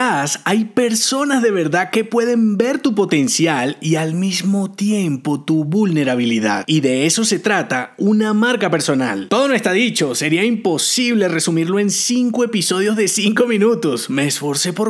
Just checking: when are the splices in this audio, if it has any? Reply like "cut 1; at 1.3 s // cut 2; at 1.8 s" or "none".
none

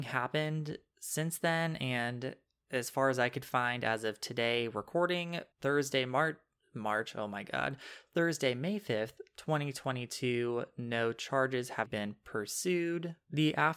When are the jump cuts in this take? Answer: cut 1; at 5.5 s // cut 2; at 11.9 s

